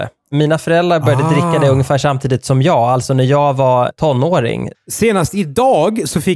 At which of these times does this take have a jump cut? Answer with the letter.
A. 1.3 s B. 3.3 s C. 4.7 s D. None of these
C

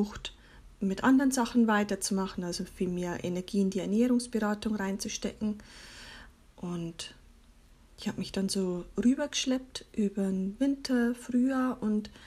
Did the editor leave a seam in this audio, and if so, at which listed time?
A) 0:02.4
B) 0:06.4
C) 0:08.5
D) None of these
B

